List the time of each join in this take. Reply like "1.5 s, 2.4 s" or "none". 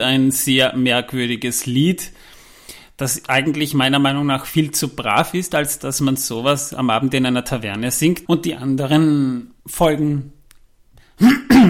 8.2 s, 9.6 s